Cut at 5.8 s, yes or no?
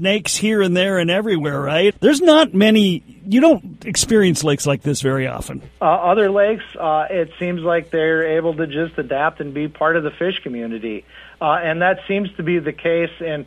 yes